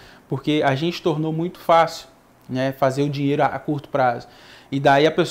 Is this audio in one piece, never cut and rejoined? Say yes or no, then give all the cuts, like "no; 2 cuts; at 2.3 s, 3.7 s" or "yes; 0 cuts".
yes; 0 cuts